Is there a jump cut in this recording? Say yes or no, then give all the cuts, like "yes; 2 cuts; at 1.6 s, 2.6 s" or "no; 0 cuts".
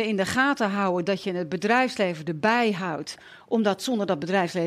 no; 0 cuts